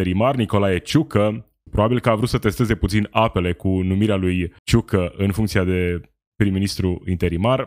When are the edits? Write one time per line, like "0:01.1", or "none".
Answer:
0:01.7
0:04.6